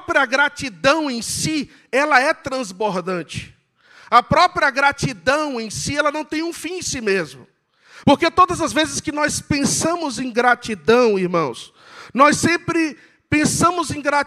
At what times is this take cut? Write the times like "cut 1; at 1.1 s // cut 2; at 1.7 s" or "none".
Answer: cut 1; at 8.0 s